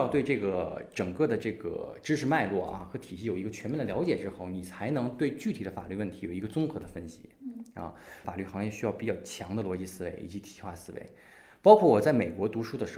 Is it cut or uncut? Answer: cut